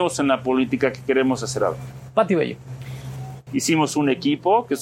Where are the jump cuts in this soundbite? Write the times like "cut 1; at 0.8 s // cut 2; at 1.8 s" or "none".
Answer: cut 1; at 3.5 s